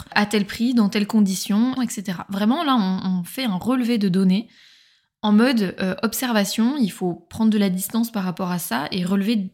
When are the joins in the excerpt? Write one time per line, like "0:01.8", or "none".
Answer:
0:01.8